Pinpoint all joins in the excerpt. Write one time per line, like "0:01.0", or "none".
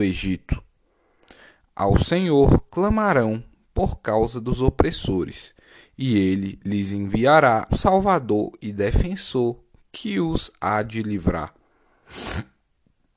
0:07.7